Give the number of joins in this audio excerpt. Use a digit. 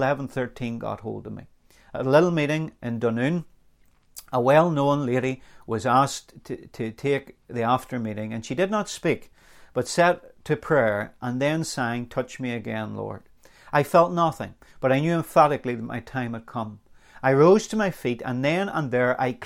0